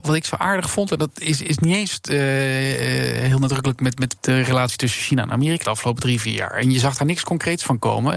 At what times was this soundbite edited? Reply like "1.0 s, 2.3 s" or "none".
4.2 s, 5.6 s